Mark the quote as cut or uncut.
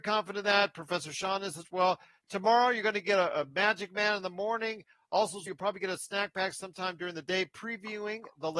cut